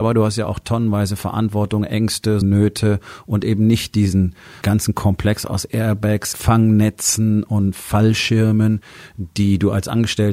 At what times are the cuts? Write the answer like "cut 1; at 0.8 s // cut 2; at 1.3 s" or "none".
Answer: cut 1; at 2.4 s // cut 2; at 4.6 s // cut 3; at 6.3 s